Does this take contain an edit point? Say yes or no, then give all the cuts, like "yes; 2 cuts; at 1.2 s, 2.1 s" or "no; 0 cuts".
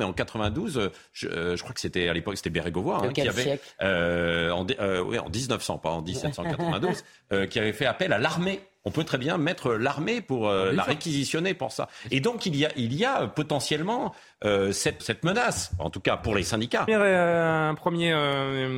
yes; 2 cuts; at 15.0 s, 16.9 s